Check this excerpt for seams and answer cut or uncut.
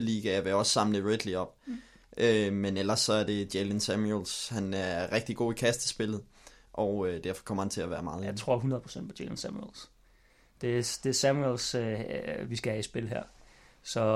uncut